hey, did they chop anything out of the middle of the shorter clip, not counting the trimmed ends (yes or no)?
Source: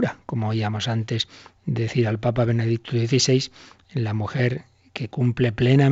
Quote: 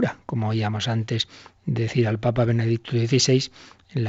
no